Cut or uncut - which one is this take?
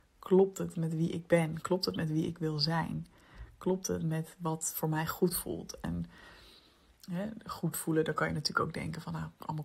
uncut